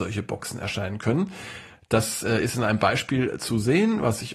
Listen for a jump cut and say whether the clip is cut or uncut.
uncut